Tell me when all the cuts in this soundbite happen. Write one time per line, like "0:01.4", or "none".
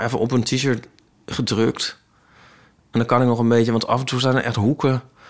none